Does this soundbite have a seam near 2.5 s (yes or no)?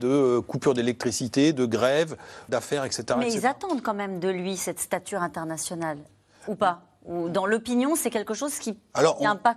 yes